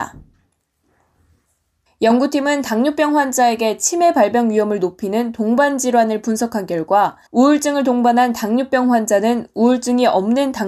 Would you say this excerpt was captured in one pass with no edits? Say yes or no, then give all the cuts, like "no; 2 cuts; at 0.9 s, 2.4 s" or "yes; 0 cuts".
no; 2 cuts; at 1.9 s, 7.3 s